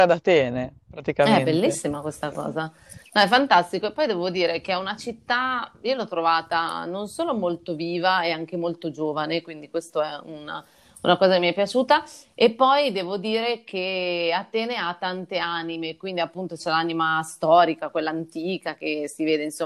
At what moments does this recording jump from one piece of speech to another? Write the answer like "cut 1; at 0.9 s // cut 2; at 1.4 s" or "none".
none